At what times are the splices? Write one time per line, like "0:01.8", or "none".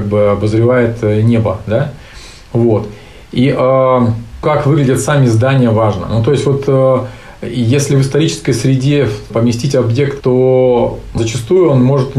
0:04.4
0:10.2